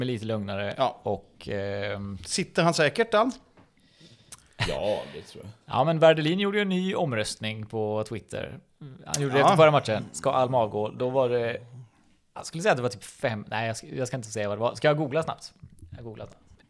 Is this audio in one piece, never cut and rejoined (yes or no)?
yes